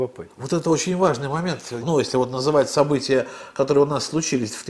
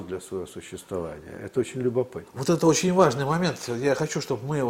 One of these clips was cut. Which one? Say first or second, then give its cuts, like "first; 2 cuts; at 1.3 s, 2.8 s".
first; 1 cut; at 1.8 s